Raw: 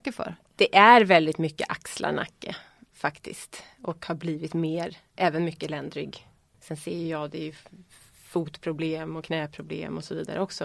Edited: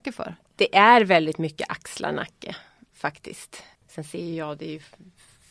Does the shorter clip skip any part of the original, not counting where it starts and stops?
yes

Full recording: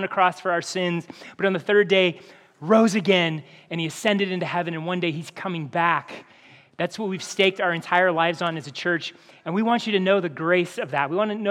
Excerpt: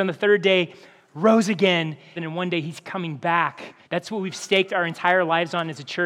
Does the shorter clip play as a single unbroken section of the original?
no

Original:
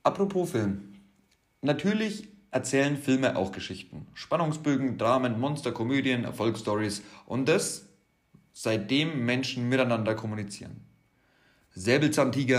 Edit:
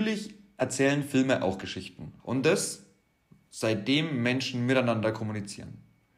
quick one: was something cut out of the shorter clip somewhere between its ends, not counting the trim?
yes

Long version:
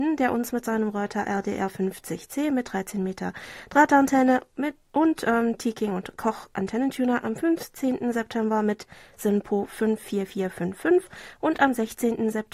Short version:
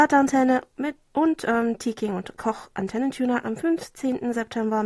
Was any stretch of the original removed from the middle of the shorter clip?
no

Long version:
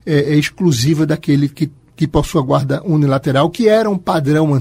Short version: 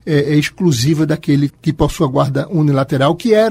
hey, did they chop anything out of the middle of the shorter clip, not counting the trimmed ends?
yes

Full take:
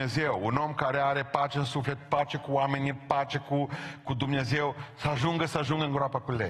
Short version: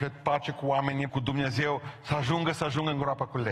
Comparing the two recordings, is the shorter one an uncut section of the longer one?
no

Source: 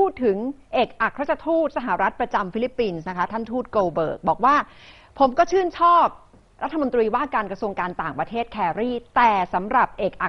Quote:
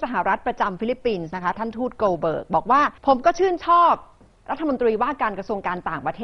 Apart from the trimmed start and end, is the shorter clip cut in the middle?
yes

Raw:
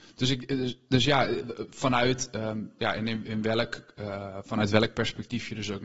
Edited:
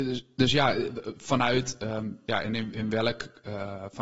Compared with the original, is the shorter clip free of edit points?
yes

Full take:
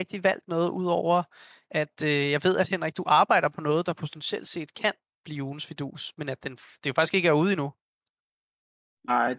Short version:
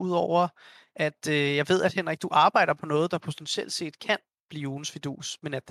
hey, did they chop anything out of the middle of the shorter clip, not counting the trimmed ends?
no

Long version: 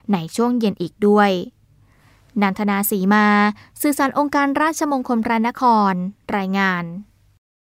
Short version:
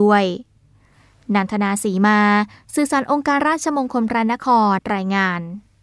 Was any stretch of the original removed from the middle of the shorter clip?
yes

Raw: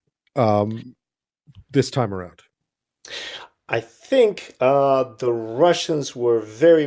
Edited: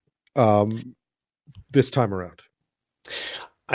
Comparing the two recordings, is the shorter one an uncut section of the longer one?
yes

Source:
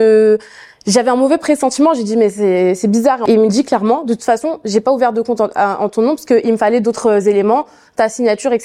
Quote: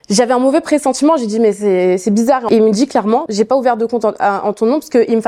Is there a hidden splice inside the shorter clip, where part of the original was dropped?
yes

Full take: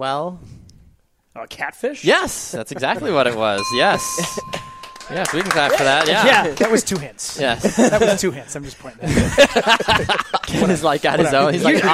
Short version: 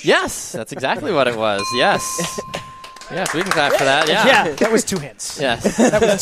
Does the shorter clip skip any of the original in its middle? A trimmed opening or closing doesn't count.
no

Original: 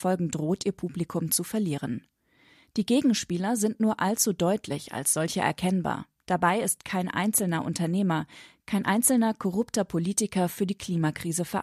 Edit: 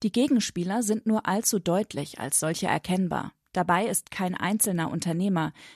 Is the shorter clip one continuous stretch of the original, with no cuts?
yes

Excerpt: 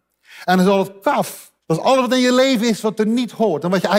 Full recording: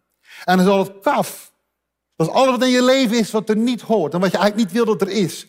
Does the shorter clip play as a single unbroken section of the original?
no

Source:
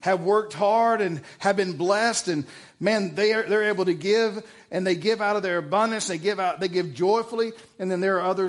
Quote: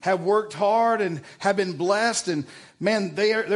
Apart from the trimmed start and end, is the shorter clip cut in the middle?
no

